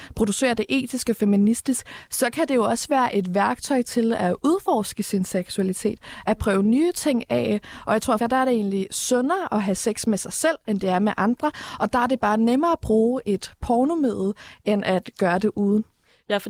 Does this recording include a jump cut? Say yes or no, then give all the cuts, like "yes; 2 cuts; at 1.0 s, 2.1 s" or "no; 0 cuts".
yes; 1 cut; at 8.2 s